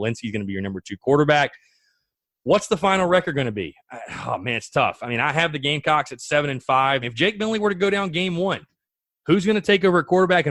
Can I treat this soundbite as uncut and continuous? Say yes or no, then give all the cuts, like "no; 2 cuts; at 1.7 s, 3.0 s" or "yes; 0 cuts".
no; 1 cut; at 7.0 s